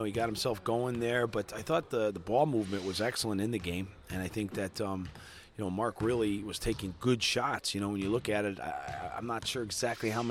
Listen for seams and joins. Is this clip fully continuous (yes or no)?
yes